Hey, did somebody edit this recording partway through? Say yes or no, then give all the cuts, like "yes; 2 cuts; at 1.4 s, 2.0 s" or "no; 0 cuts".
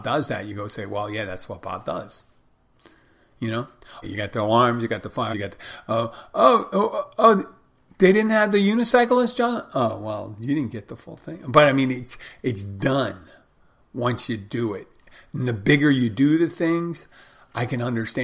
yes; 2 cuts; at 4.0 s, 5.3 s